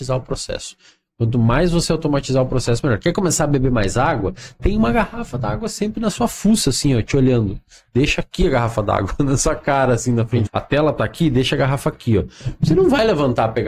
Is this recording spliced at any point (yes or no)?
yes